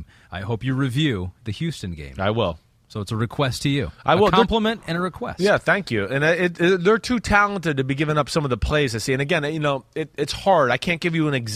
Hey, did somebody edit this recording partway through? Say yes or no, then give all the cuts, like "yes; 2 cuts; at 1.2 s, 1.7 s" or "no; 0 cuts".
no; 0 cuts